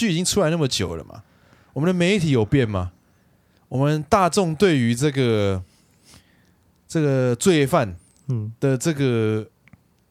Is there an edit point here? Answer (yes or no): no